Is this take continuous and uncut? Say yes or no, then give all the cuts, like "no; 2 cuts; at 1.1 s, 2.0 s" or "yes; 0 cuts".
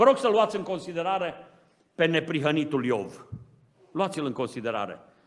yes; 0 cuts